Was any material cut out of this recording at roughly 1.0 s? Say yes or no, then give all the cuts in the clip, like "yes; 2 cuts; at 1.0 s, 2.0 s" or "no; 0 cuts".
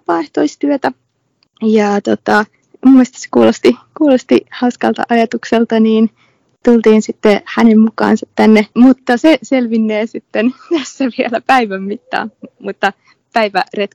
no; 1 cut; at 8.7 s